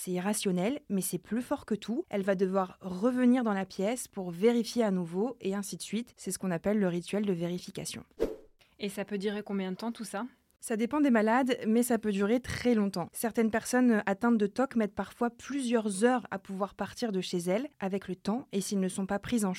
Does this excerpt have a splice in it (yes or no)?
no